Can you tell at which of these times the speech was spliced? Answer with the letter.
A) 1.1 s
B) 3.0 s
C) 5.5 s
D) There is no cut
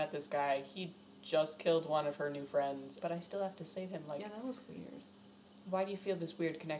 B